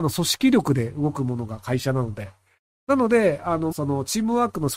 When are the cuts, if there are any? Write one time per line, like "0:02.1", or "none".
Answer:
0:03.7